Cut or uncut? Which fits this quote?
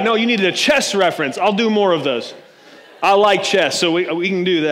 uncut